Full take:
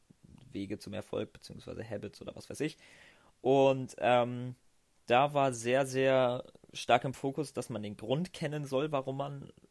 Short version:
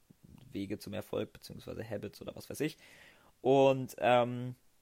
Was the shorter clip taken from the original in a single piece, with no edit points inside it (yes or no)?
yes